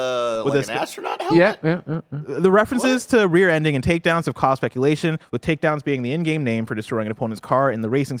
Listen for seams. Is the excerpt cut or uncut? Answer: uncut